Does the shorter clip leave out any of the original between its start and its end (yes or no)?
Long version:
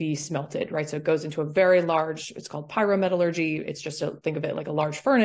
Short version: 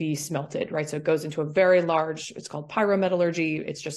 no